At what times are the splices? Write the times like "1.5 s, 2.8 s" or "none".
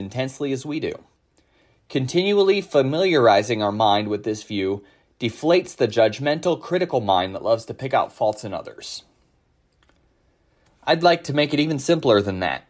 none